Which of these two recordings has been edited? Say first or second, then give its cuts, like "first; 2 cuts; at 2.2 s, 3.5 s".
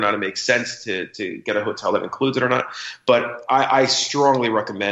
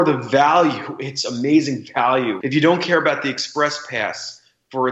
second; 1 cut; at 2.4 s